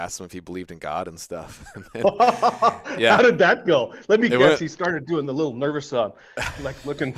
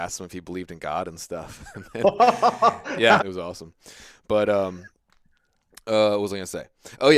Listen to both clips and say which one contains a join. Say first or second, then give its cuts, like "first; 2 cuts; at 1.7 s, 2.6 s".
second; 1 cut; at 3.2 s